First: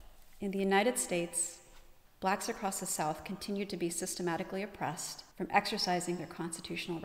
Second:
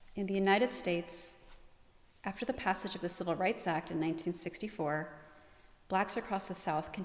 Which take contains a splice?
first; 2 cuts; at 2.1 s, 5.3 s

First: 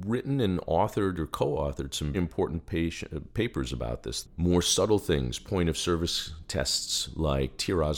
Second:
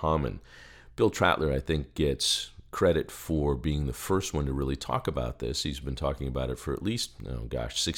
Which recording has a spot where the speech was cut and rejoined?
first; 2 cuts; at 2.1 s, 4.2 s

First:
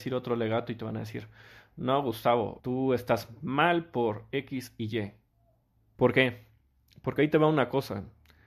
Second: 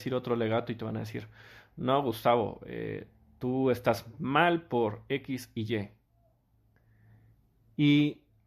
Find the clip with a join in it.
first; 2 cuts; at 2.6 s, 5.9 s

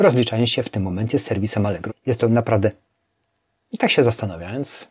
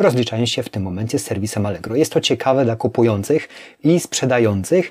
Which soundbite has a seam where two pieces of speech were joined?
first; 1 cut; at 1.9 s

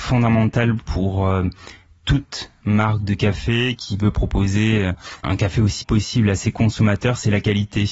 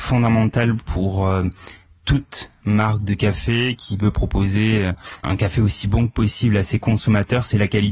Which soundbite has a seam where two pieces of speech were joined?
first; 1 cut; at 5.8 s

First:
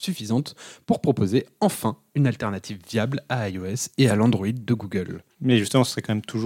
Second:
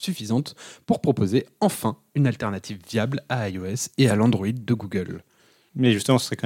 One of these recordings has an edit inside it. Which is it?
first; 1 cut; at 5.3 s

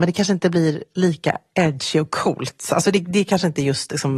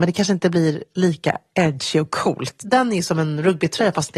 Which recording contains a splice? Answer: second; 1 cut; at 2.6 s

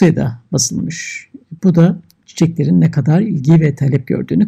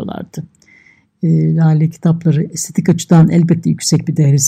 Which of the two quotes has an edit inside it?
first; 1 cut; at 1.6 s

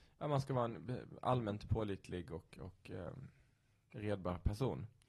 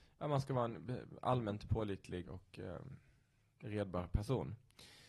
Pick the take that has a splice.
second; 1 cut; at 2.2 s

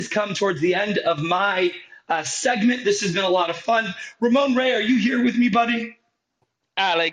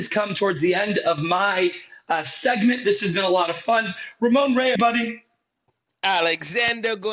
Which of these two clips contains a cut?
second; 1 cut; at 4.8 s

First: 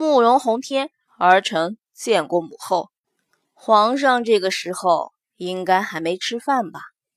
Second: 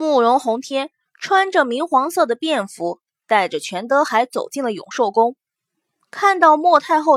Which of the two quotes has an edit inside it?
first; 1 cut; at 1.1 s

